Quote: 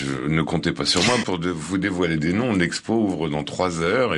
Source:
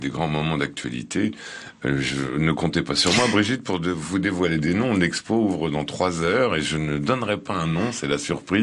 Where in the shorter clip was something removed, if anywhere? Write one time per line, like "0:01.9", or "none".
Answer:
0:01.2